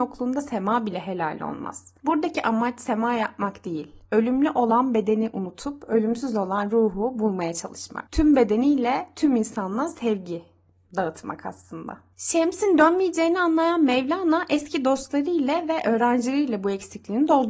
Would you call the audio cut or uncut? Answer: uncut